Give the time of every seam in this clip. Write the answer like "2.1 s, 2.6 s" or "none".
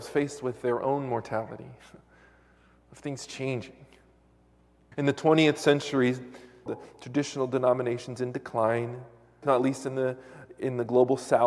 4.9 s, 6.7 s, 9.4 s